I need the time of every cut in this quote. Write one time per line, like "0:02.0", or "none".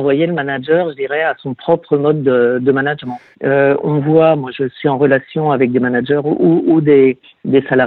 0:03.3